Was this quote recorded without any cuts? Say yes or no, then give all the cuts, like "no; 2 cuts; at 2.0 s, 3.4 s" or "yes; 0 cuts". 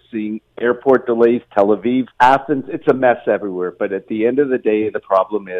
no; 1 cut; at 2.1 s